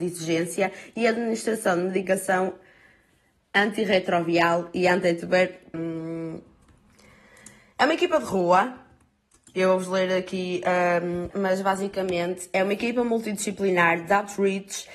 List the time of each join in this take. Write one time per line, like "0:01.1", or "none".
0:05.7
0:11.3